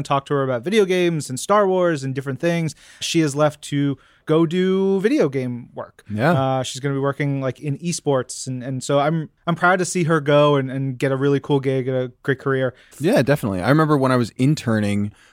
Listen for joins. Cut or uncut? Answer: cut